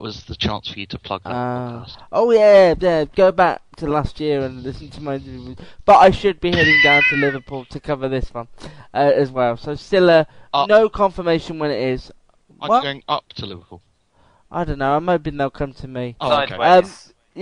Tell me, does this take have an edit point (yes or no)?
no